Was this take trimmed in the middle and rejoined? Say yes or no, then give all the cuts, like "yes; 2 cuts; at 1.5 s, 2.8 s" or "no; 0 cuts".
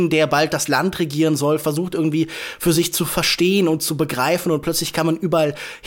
no; 0 cuts